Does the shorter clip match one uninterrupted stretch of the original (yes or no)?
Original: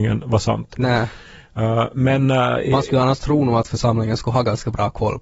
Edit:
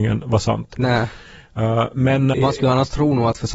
no